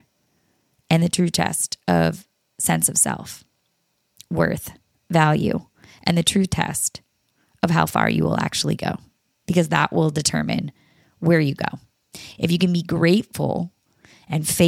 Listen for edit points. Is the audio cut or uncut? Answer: uncut